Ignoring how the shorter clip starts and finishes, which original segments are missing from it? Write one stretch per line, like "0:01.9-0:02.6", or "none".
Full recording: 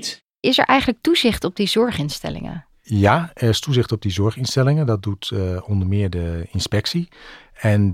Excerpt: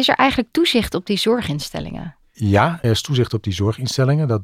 0:03.3-0:03.4